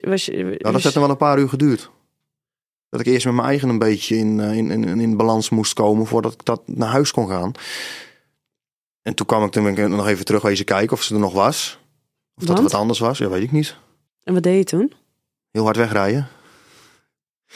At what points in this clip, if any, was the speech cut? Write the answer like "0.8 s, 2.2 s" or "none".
14.1 s